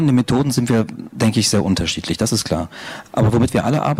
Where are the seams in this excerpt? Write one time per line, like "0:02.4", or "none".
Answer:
none